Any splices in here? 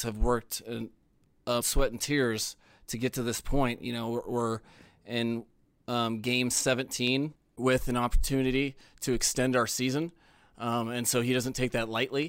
yes; 1 cut; at 1.6 s

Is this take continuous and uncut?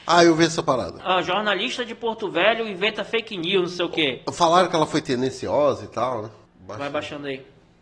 no; 2 cuts; at 1.0 s, 6.5 s

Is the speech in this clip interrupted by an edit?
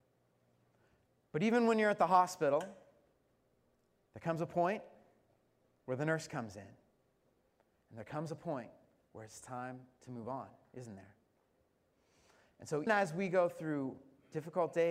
yes; 1 cut; at 12.9 s

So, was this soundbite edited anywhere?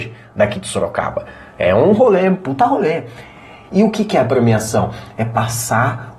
yes; 1 cut; at 3.7 s

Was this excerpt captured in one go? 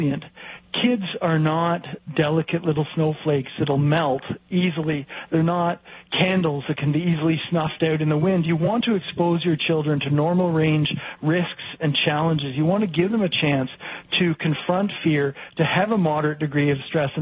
yes; 0 cuts

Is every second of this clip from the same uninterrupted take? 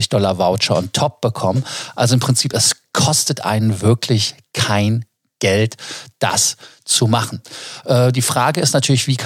yes; 0 cuts

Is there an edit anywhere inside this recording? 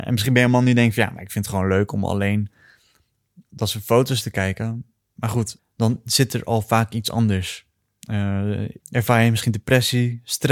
yes; 2 cuts; at 5.6 s, 8.8 s

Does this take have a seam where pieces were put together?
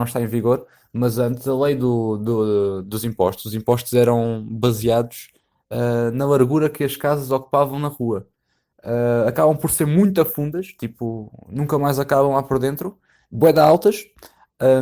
yes; 1 cut; at 8.7 s

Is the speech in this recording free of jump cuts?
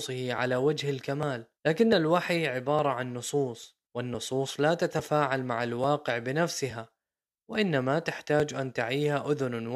no; 2 cuts; at 1.6 s, 3.9 s

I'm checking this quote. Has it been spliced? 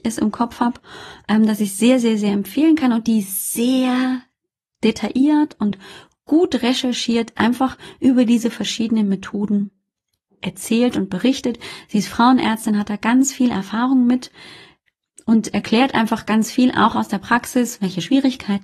no; 0 cuts

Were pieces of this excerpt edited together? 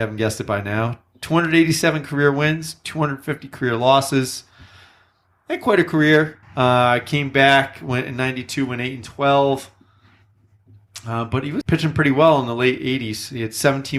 yes; 2 cuts; at 6.4 s, 11.6 s

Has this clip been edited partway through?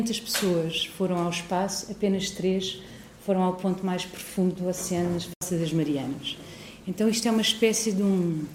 no; 0 cuts

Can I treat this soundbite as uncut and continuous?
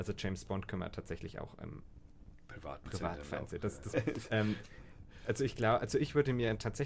no; 1 cut; at 3.9 s

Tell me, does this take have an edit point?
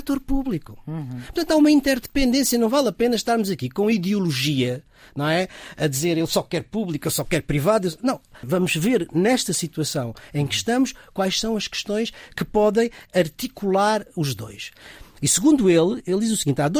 no; 0 cuts

